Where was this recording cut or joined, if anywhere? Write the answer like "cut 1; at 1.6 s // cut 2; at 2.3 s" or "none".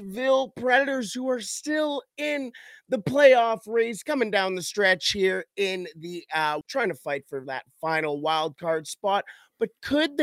cut 1; at 6.6 s